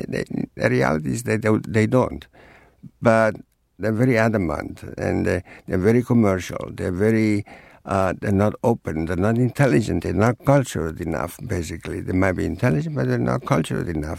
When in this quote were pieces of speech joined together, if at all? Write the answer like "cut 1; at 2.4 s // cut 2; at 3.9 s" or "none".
none

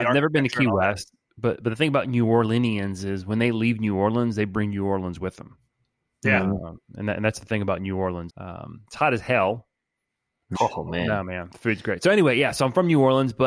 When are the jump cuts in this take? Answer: cut 1; at 8.3 s // cut 2; at 10.5 s

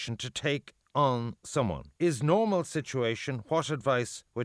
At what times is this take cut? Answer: cut 1; at 2.0 s

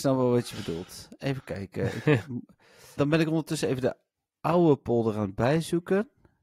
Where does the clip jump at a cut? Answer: cut 1; at 3.0 s

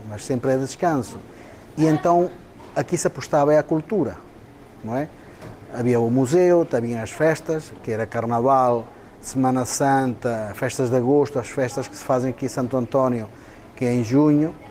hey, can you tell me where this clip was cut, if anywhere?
none

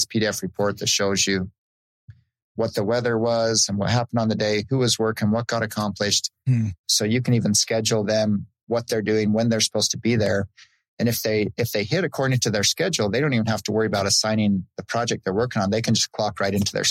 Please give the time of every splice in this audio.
cut 1; at 6.8 s

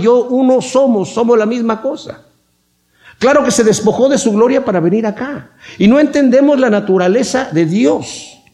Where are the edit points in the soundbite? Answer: none

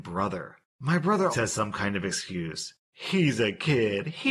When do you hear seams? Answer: cut 1; at 1.3 s

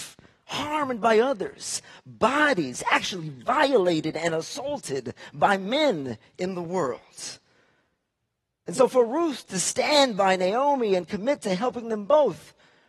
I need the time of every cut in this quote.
none

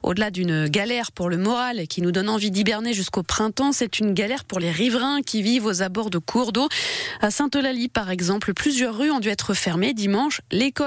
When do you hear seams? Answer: none

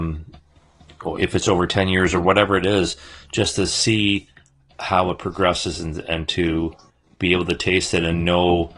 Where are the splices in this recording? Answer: none

